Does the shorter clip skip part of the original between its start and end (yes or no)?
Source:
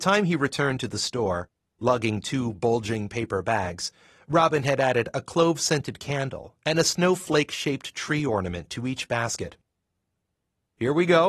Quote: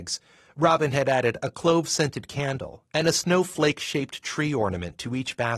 no